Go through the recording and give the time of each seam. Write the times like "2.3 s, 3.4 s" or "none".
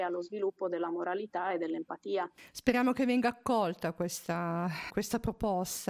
4.9 s